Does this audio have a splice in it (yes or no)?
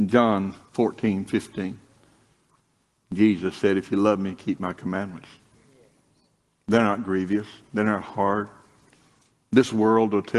no